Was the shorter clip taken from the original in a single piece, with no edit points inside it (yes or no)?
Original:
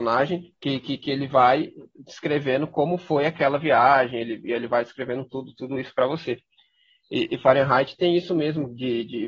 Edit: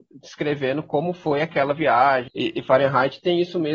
no